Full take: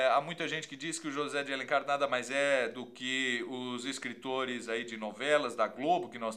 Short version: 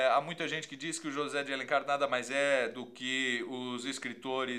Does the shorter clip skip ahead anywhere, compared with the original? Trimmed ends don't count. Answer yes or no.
no